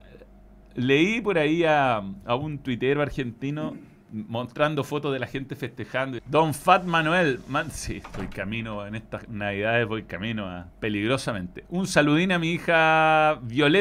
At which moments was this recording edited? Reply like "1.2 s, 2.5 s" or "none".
6.2 s, 10.7 s